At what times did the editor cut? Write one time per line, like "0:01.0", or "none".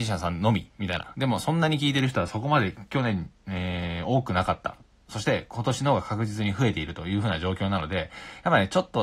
none